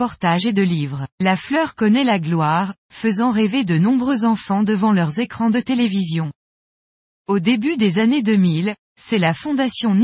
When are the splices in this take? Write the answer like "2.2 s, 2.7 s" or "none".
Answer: 1.1 s